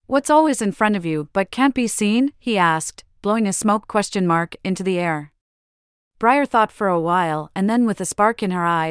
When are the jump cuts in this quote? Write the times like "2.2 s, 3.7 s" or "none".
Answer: none